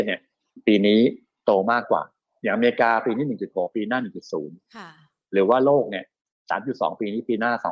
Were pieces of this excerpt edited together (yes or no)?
no